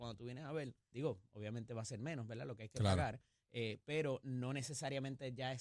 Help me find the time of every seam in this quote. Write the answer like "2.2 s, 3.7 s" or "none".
0.9 s